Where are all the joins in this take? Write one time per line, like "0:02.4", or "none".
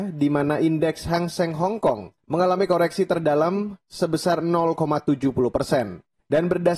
0:02.2